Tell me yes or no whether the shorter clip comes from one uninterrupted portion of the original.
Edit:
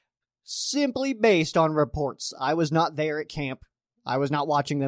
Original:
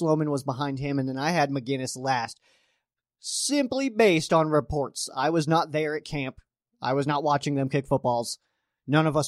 yes